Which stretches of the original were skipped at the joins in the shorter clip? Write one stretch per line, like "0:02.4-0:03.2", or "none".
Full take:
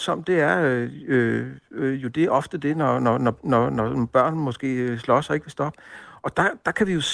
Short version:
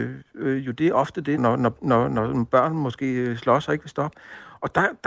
0:02.7-0:03.0

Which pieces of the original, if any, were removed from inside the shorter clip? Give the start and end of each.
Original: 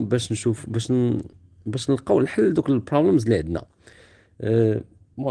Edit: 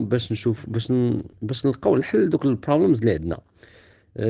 0:01.3-0:01.6

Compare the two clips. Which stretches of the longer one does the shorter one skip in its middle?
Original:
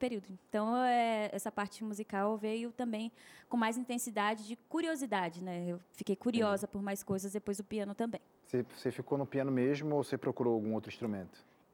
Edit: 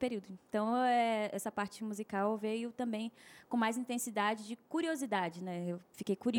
none

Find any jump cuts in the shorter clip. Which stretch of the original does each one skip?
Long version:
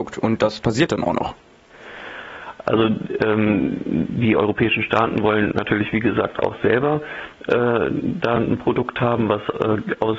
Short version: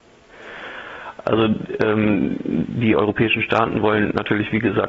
none

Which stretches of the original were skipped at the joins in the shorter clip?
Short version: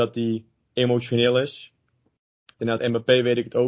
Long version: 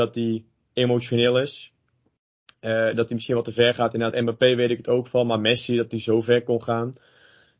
0:02.6-0:03.9

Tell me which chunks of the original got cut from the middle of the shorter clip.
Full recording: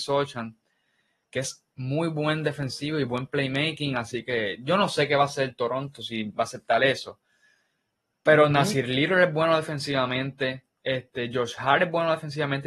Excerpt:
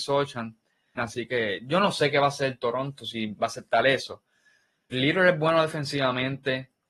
0:01.0-0:03.9
0:07.9-0:08.9

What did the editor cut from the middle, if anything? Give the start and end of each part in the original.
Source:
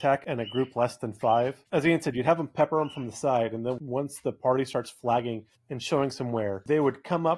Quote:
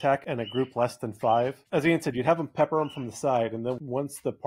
none

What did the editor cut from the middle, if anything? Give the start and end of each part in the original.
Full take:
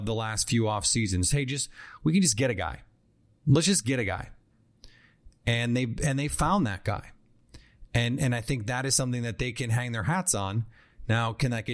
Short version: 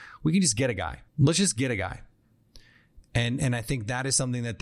0:02.9-0:03.4
0:05.4-0:07.9

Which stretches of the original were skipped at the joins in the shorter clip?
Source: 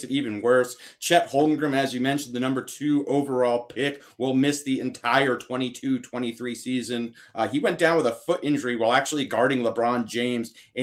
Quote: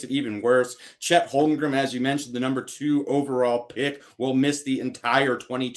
none

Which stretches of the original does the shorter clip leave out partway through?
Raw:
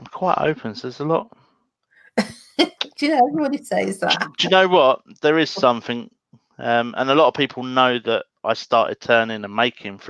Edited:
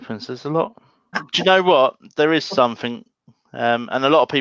0:01.7-0:04.2

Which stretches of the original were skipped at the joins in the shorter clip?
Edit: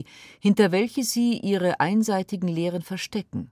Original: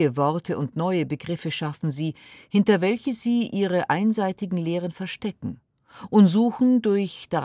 none

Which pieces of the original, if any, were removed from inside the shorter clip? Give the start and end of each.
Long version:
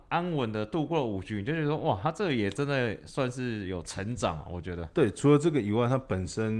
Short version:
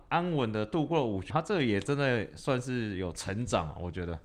0:01.3-0:02.0

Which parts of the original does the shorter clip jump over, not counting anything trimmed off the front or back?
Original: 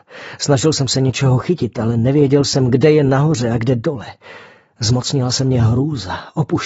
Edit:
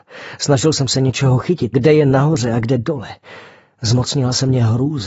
0:01.7-0:02.7

